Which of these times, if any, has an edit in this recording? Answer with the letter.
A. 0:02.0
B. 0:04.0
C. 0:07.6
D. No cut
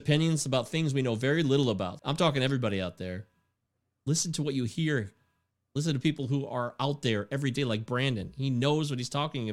A